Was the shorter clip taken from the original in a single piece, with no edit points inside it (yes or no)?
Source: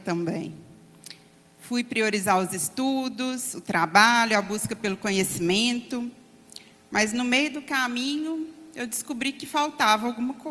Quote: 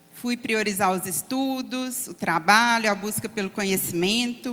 yes